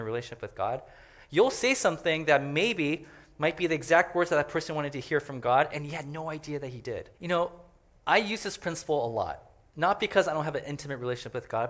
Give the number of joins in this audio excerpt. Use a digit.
2